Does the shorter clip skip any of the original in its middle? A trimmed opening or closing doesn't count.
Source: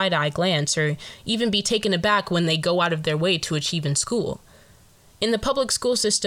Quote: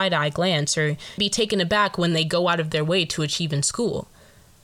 yes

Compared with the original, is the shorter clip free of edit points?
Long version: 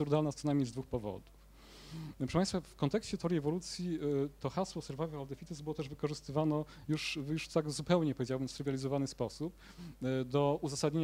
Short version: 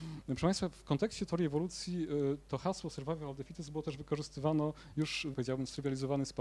no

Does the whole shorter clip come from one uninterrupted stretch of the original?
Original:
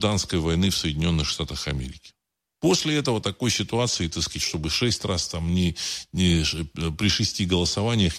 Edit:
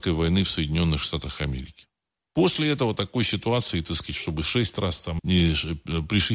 no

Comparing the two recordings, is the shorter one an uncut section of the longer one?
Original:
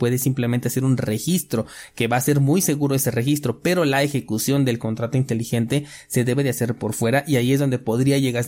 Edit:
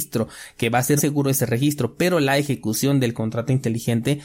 no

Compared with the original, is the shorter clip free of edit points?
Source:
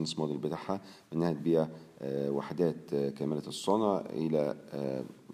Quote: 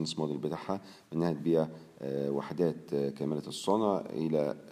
yes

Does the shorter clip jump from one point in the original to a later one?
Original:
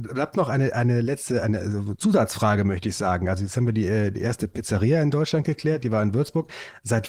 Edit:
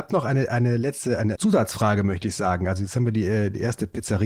yes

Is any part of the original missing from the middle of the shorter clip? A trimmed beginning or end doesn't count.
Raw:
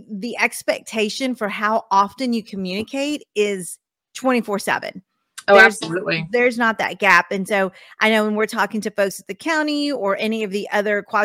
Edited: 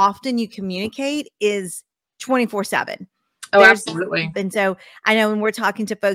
yes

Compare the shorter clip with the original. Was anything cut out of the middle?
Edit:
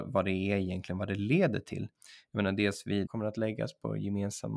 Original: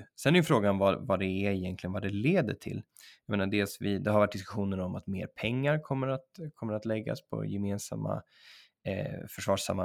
yes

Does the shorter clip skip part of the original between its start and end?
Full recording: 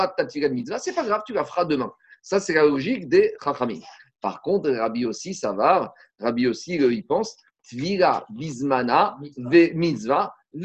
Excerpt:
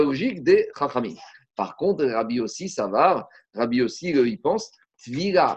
no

